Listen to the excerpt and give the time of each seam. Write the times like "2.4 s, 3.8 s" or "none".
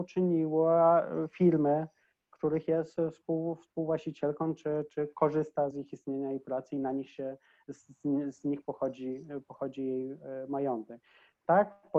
5.7 s